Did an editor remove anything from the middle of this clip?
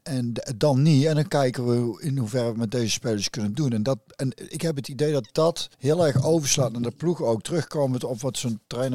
yes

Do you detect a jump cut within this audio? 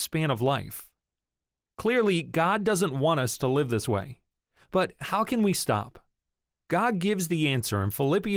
no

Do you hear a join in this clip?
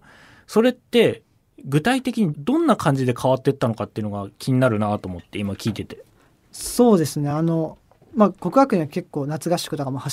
no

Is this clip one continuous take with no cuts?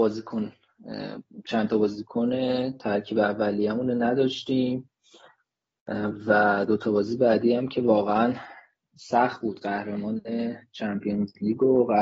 yes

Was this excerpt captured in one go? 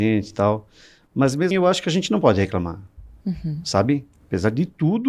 no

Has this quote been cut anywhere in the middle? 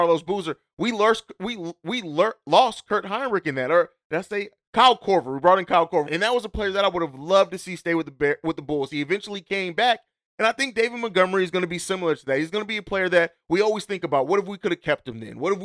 yes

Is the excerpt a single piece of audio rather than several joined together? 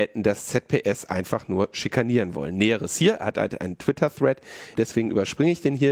no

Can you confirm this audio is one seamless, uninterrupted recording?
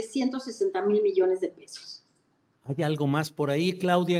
no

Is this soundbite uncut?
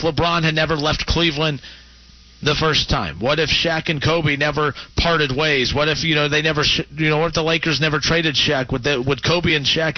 yes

